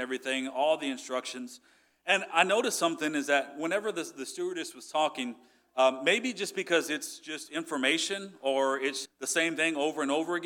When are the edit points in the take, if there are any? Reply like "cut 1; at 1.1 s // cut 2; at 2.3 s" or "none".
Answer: cut 1; at 9.0 s

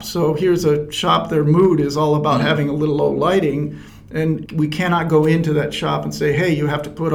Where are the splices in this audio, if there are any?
cut 1; at 4.5 s

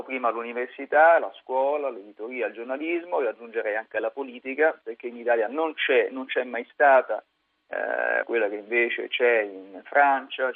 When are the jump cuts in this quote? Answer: cut 1; at 8.2 s

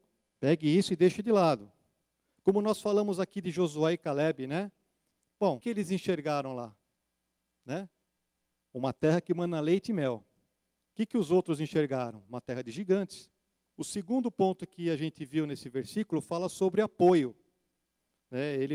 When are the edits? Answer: cut 1; at 5.6 s // cut 2; at 13.7 s

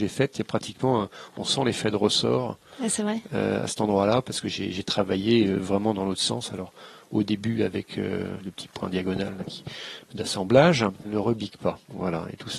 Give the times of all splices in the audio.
cut 1; at 8.4 s // cut 2; at 11.0 s

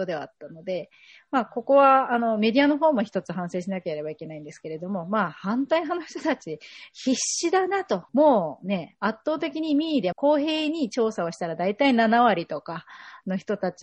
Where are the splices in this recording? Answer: cut 1; at 8.1 s // cut 2; at 10.1 s

